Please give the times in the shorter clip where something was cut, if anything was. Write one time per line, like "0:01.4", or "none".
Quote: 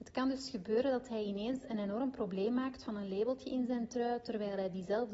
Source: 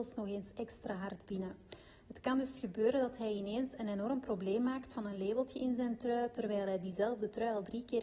none